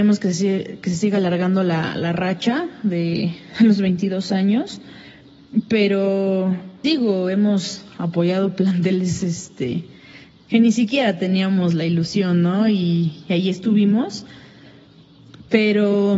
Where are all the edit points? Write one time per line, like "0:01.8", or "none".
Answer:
0:06.8